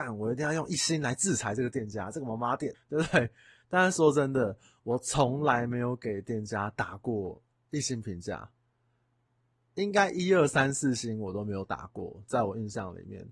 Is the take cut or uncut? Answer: cut